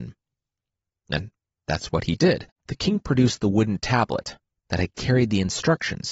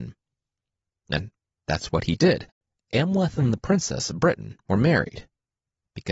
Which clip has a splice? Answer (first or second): first